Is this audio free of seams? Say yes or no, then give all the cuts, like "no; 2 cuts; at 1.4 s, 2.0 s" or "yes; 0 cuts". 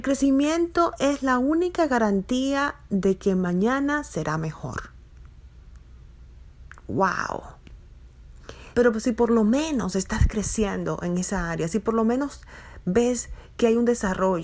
no; 1 cut; at 8.7 s